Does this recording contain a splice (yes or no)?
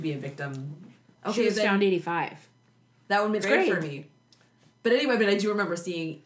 yes